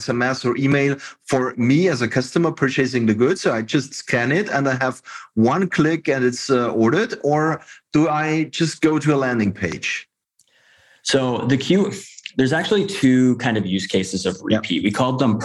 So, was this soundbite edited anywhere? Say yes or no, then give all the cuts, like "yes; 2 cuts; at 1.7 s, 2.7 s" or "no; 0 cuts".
no; 0 cuts